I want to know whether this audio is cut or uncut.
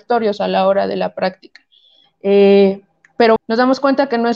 cut